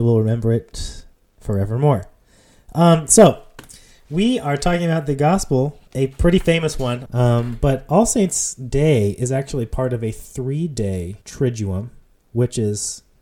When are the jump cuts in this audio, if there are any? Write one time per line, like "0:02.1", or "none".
0:05.9
0:07.1
0:11.2